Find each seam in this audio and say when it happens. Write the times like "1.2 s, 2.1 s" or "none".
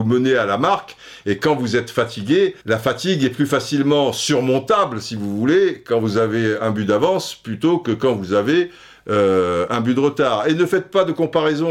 2.6 s